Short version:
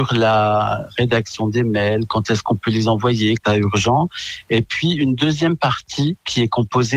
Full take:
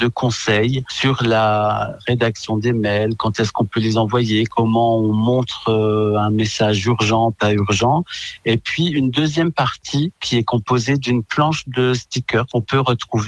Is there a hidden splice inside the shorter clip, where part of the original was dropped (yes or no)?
yes